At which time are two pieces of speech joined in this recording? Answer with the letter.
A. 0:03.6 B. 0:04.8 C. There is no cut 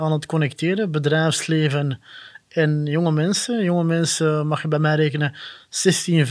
C